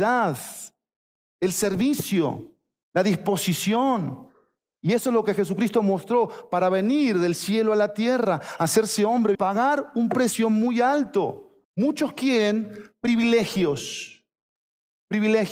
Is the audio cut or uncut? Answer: cut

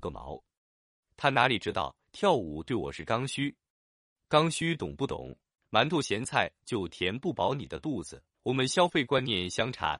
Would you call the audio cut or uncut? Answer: cut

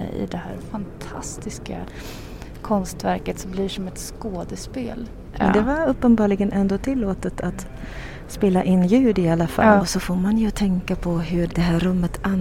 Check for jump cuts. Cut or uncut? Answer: cut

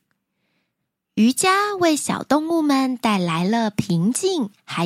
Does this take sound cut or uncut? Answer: uncut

